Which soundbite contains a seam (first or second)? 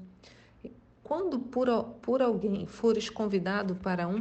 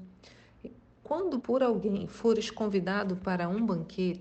second